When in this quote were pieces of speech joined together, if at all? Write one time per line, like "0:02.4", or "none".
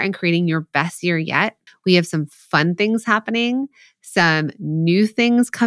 0:01.7